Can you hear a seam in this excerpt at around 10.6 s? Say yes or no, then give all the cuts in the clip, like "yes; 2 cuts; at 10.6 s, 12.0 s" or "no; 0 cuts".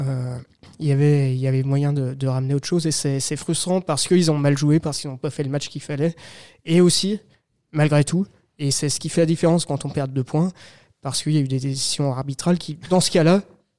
no; 0 cuts